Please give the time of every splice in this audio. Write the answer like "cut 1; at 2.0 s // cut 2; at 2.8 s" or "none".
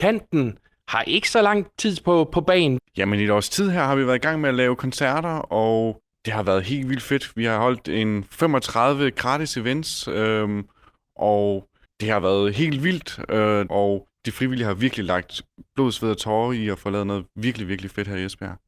cut 1; at 2.8 s // cut 2; at 13.7 s